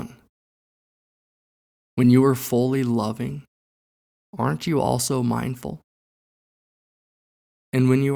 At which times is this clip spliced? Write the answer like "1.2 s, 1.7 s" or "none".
none